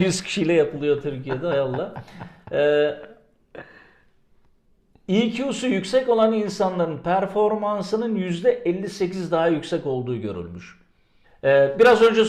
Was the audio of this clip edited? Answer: yes; 1 cut; at 11.2 s

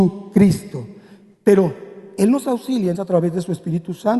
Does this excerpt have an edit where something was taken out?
yes; 1 cut; at 2.9 s

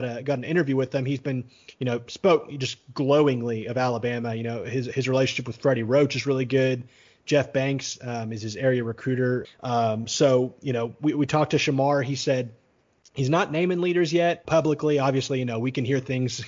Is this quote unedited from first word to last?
no; 2 cuts; at 9.4 s, 14.4 s

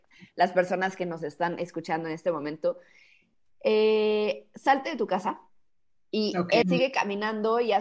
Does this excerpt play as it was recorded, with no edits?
no; 1 cut; at 6.6 s

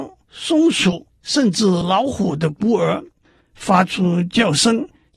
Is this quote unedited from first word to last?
no; 1 cut; at 3.4 s

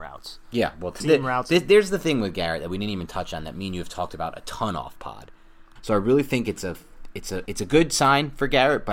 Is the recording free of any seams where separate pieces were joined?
no; 3 cuts; at 1.0 s, 5.8 s, 7.5 s

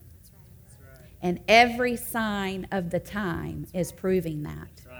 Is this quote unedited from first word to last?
yes; 0 cuts

